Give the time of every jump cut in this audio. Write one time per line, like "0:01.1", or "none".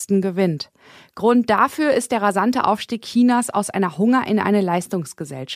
none